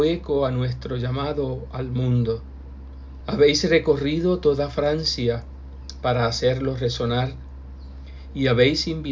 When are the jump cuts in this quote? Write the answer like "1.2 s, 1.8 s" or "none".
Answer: 3.2 s